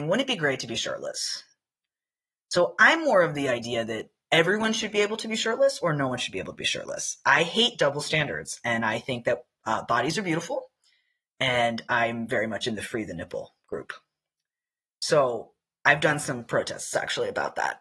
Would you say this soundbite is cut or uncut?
uncut